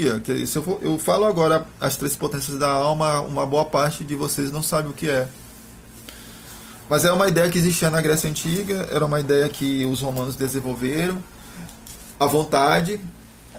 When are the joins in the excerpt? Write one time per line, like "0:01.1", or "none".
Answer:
0:12.1